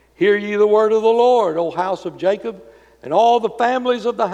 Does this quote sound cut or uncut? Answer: uncut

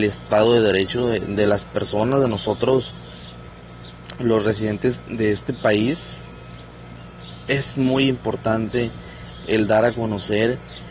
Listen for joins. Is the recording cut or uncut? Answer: uncut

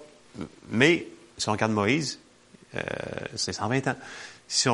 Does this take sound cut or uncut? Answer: uncut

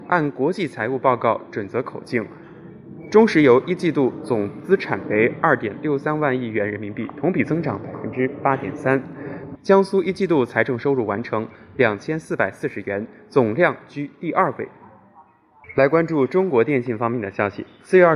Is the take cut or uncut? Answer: cut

